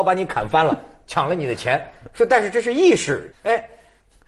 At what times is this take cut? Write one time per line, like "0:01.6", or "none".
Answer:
0:03.3